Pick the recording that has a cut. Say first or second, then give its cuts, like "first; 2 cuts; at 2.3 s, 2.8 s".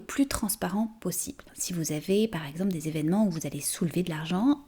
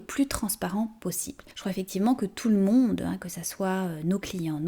first; 1 cut; at 1.5 s